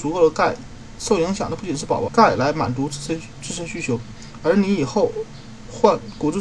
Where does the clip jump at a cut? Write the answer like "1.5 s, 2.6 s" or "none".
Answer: 2.1 s